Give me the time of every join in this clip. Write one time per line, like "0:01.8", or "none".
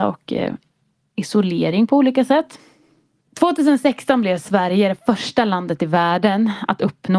0:03.3